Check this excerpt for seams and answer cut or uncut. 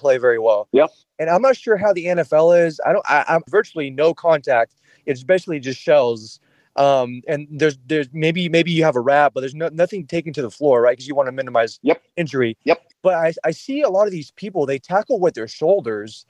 cut